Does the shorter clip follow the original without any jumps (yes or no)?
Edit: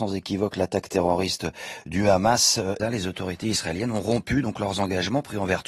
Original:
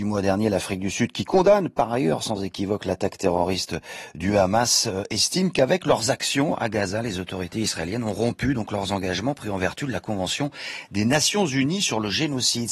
no